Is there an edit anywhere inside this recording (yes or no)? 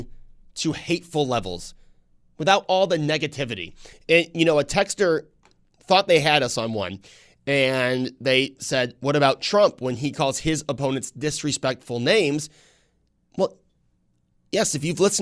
no